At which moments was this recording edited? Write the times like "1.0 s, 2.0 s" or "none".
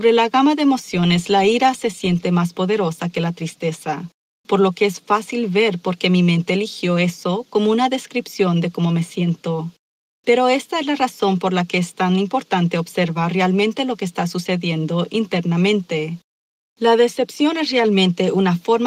none